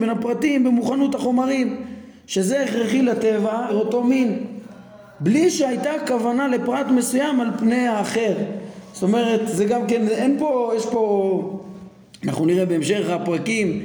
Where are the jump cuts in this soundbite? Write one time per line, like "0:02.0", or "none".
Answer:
0:03.7